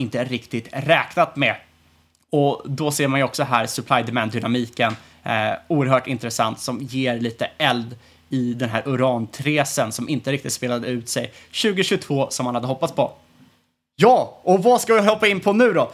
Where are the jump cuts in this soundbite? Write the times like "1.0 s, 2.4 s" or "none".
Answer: none